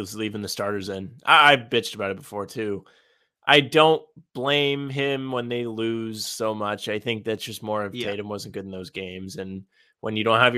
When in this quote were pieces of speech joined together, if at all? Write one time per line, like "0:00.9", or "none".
none